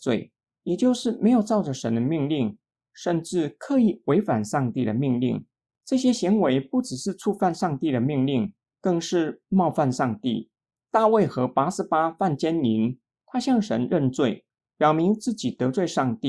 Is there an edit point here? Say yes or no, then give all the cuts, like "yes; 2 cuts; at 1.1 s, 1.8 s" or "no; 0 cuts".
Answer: no; 0 cuts